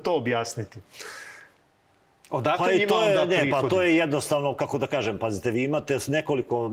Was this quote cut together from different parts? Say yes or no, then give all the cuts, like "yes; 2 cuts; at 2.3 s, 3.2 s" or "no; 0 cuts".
no; 0 cuts